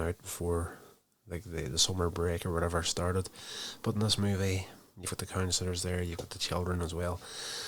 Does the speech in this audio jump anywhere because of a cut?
no; 0 cuts

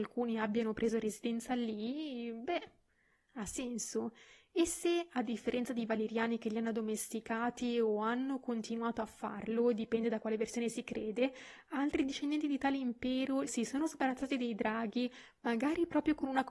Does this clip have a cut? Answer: yes; 1 cut; at 13.5 s

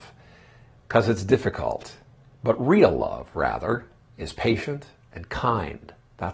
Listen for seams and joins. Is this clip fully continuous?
yes; 0 cuts

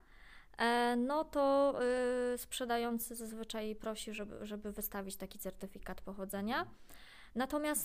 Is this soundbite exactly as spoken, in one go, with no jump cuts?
yes; 0 cuts

